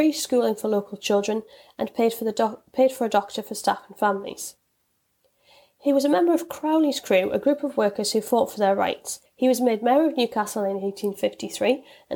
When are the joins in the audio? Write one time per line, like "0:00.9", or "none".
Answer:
0:09.3